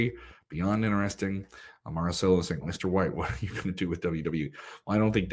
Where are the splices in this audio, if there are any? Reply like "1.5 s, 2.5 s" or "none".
2.6 s